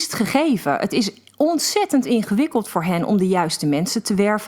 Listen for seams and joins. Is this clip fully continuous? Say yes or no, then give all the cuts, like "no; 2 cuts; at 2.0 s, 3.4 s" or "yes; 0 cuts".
yes; 0 cuts